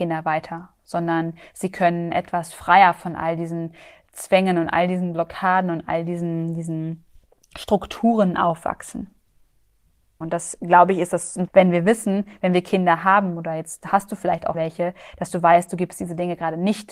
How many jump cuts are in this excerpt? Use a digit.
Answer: 3